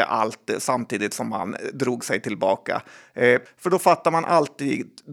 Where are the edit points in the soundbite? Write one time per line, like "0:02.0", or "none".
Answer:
0:03.5